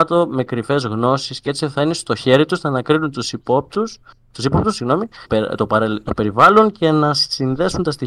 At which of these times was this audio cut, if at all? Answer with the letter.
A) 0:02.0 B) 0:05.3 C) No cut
B